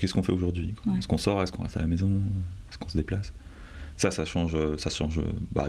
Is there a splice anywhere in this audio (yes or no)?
no